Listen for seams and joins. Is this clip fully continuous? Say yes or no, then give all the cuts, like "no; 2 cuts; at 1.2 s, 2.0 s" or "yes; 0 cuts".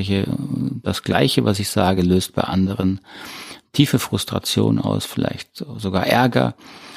yes; 0 cuts